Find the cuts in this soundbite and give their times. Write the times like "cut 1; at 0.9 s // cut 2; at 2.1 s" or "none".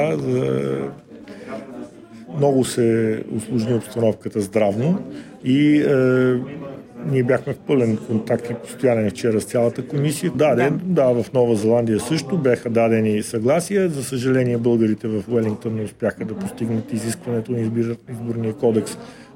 cut 1; at 5.4 s // cut 2; at 10.3 s